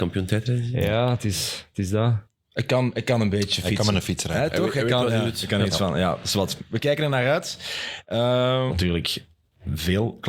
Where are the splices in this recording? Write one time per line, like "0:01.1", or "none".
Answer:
0:08.7